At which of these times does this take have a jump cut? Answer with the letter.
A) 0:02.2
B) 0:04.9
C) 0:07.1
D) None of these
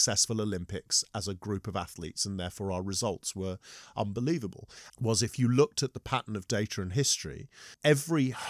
B